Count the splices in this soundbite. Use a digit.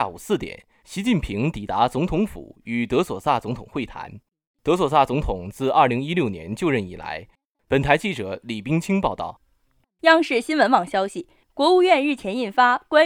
1